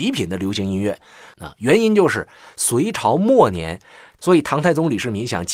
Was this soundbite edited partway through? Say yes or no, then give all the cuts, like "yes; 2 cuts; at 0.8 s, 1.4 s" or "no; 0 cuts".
yes; 2 cuts; at 1.3 s, 4.2 s